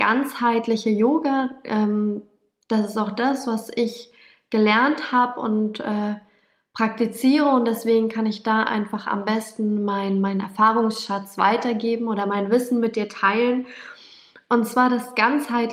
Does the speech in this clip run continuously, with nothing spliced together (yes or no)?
yes